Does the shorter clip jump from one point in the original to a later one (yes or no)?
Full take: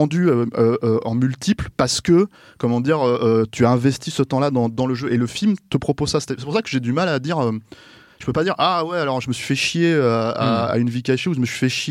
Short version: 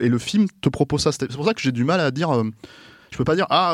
no